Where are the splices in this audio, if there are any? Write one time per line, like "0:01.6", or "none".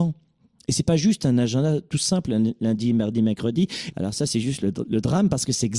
0:03.9